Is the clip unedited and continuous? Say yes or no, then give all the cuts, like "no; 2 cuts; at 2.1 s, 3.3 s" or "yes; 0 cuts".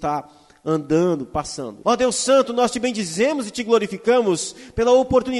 no; 1 cut; at 1.8 s